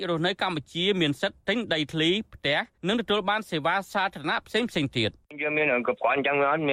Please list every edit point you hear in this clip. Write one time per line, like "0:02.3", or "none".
0:02.7
0:05.8